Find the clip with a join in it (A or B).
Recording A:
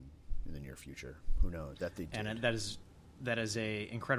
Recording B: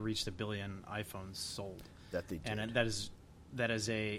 A